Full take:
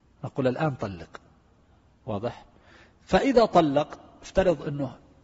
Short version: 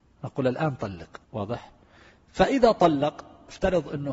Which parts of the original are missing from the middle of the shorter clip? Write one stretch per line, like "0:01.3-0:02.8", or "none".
0:01.2-0:02.0